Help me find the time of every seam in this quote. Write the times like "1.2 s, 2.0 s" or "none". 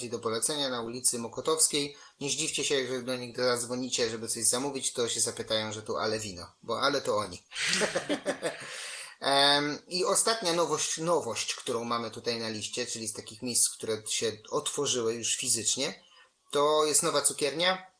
none